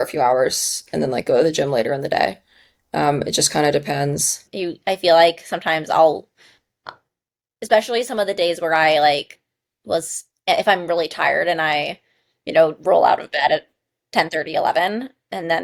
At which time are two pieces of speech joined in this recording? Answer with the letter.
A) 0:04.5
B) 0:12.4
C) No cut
A